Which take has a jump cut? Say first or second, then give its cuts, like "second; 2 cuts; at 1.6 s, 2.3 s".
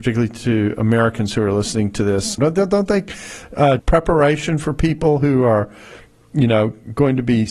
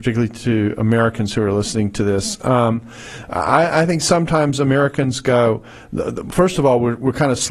first; 2 cuts; at 2.4 s, 3.8 s